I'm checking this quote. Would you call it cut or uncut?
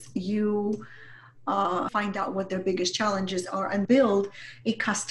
cut